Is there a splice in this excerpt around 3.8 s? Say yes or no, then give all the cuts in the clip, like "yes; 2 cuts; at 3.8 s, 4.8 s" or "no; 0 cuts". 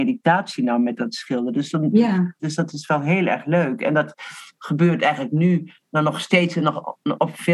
no; 1 cut; at 2.4 s